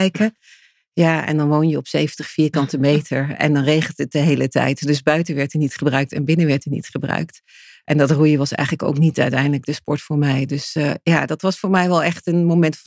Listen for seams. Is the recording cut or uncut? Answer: uncut